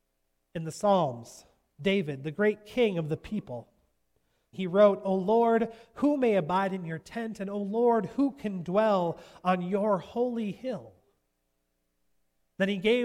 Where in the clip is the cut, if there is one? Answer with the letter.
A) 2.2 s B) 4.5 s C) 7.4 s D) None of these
B